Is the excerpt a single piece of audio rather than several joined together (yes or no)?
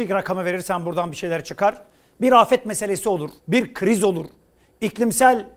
no